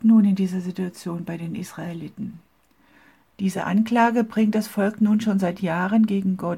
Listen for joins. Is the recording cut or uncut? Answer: cut